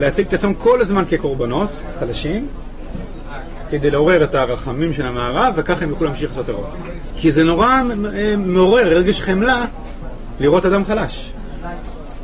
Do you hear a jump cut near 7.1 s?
yes; 1 cut; at 7.1 s

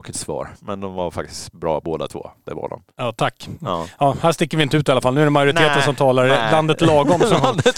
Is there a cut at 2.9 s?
yes; 1 cut; at 2.9 s

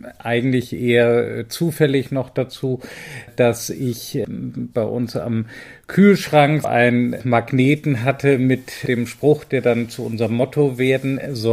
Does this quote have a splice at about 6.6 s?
yes; 1 cut; at 6.6 s

